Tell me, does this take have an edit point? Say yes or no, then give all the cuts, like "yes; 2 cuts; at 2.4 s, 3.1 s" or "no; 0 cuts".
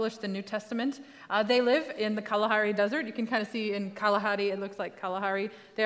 no; 0 cuts